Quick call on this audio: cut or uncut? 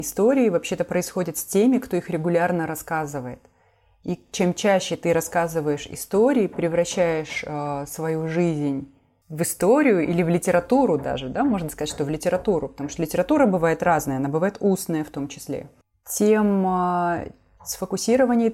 uncut